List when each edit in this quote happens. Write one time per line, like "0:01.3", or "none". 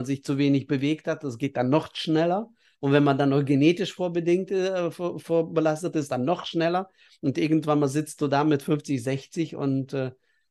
none